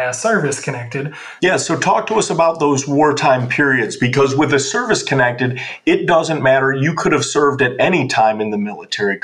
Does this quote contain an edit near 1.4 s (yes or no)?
yes